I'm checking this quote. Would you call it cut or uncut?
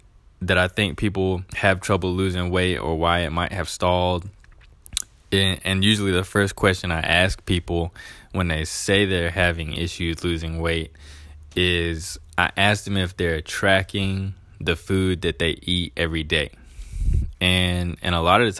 cut